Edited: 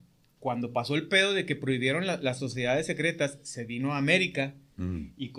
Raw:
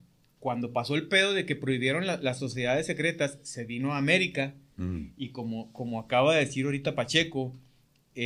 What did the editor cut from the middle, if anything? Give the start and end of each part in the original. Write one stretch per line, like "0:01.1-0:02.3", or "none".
none